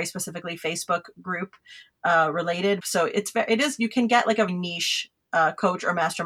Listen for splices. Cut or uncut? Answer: cut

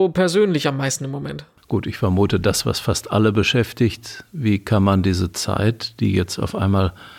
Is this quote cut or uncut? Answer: uncut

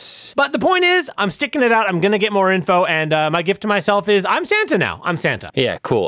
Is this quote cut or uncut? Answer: uncut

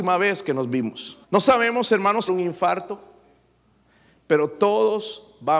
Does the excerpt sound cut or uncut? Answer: cut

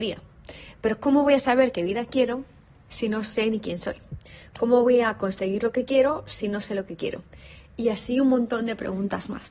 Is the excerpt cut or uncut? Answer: uncut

